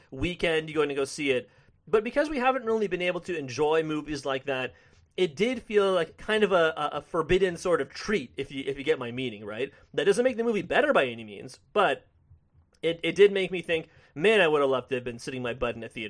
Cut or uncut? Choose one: uncut